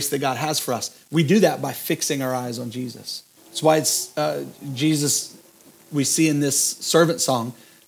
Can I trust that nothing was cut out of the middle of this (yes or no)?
no